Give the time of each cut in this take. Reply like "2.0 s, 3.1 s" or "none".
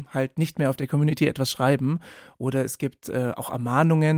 none